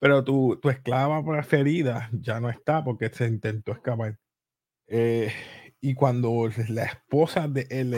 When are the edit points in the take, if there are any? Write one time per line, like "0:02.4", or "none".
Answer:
0:04.7